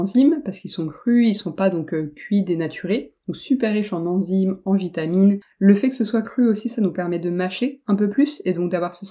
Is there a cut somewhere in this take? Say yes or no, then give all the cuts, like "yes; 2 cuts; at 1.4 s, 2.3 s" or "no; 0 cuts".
no; 0 cuts